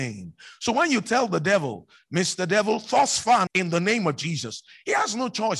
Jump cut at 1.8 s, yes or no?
no